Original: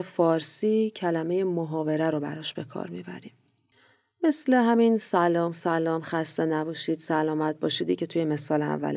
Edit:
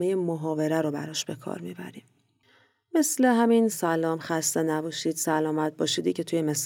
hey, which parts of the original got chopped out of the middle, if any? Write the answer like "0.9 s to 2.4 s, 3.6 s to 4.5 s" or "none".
5.0 s to 5.5 s